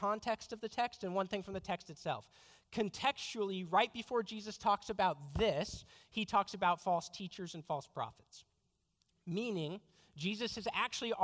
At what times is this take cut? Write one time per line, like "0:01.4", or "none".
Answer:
none